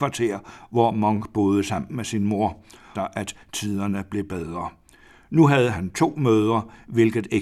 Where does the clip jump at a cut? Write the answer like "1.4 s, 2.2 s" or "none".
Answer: 3.0 s